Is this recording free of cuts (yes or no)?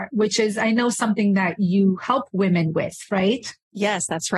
yes